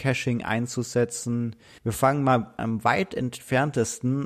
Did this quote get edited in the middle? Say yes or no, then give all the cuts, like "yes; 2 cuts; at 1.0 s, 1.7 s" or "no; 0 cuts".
yes; 1 cut; at 1.8 s